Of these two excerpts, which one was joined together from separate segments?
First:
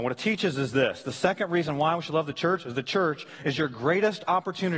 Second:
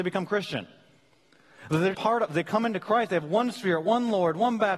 second; 1 cut; at 1.9 s

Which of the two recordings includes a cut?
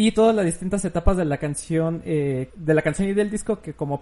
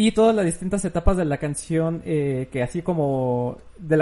first; 1 cut; at 2.5 s

